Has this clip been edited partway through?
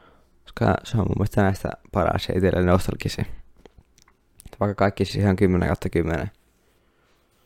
no; 0 cuts

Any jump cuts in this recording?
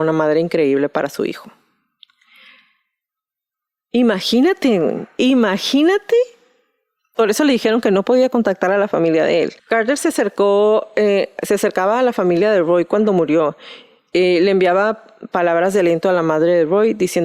yes; 1 cut; at 9.6 s

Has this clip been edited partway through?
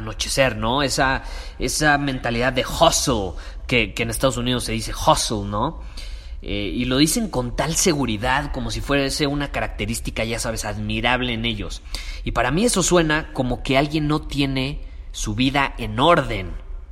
no; 0 cuts

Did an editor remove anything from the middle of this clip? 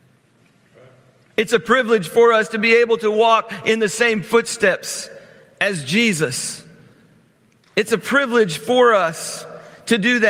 no; 0 cuts

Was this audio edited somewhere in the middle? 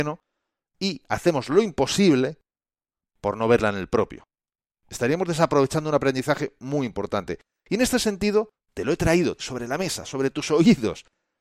yes; 1 cut; at 9.4 s

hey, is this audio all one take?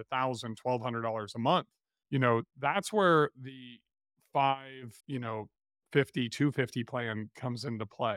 no; 1 cut; at 5.0 s

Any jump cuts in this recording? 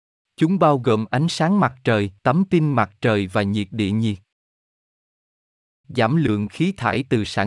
yes; 2 cuts; at 2.2 s, 5.8 s

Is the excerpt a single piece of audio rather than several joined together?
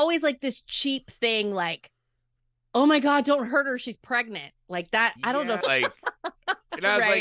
no; 1 cut; at 5.6 s

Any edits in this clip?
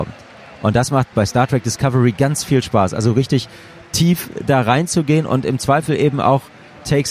yes; 1 cut; at 1.1 s

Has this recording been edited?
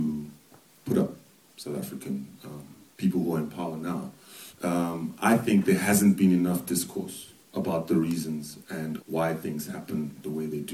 yes; 3 cuts; at 4.5 s, 7.4 s, 9.0 s

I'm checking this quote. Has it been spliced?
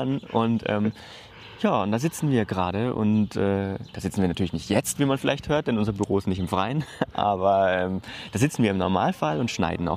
yes; 1 cut; at 3.9 s

